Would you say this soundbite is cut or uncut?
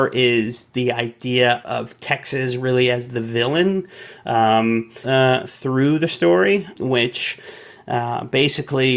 cut